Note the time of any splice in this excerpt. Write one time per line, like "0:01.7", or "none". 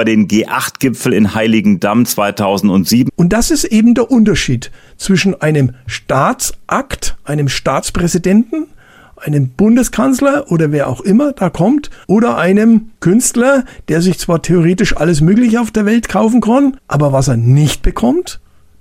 0:03.1
0:12.0